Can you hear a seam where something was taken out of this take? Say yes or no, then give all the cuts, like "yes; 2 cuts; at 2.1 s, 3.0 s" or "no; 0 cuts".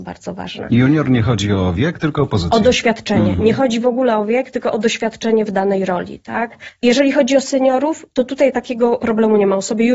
no; 0 cuts